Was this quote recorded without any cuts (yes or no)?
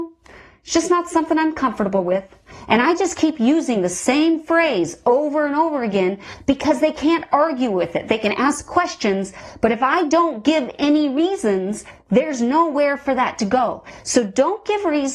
yes